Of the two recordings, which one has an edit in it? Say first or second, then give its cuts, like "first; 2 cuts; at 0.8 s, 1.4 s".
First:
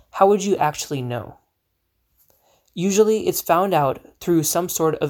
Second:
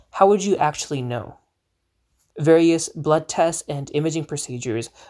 second; 1 cut; at 2.3 s